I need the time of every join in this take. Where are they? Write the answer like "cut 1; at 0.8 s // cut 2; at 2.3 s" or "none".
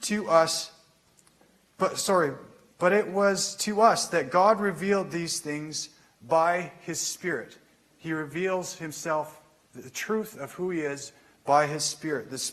none